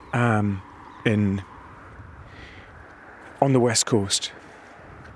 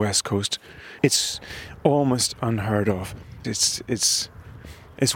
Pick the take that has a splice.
second; 2 cuts; at 1.0 s, 3.4 s

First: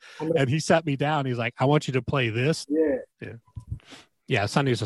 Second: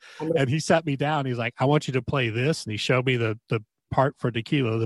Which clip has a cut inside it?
first; 1 cut; at 2.6 s

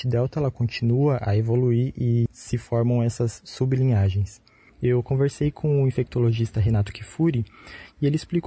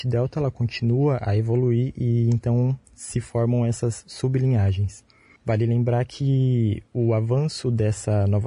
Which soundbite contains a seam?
first; 2 cuts; at 2.3 s, 4.7 s

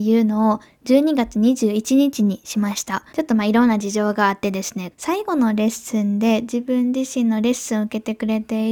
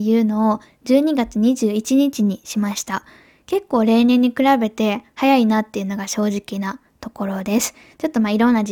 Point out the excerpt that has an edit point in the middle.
first; 2 cuts; at 3.1 s, 4.9 s

